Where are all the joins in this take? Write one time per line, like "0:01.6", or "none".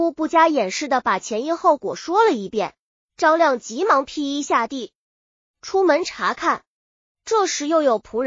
0:03.0